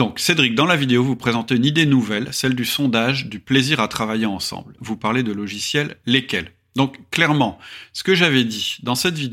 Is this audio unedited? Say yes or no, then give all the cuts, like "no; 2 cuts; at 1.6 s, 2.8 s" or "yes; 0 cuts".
no; 1 cut; at 4.8 s